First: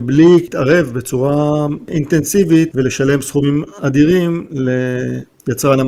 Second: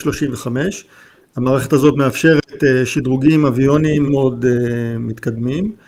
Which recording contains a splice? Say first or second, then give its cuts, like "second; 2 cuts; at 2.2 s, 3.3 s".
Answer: second; 1 cut; at 4.1 s